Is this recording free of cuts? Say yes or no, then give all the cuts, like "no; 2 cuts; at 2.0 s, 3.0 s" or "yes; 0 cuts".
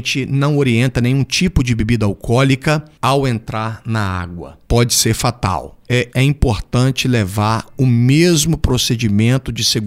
no; 2 cuts; at 4.6 s, 6.1 s